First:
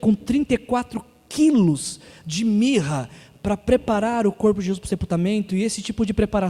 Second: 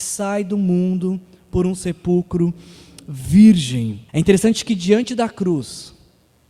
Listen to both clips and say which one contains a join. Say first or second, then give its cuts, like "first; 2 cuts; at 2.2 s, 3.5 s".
second; 1 cut; at 4.1 s